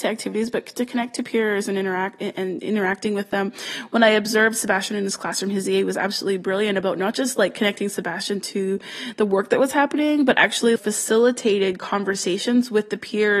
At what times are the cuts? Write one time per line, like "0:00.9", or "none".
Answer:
0:10.8